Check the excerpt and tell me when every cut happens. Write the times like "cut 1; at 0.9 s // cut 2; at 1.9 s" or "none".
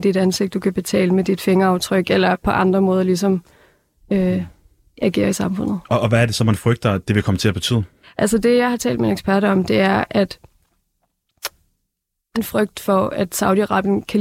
cut 1; at 12.3 s